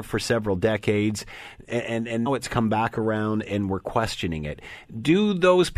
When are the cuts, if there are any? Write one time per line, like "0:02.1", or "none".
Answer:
0:02.3
0:03.4